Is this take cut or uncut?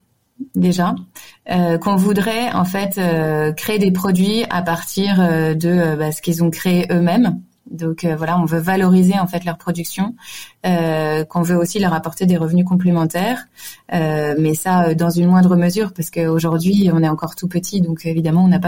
uncut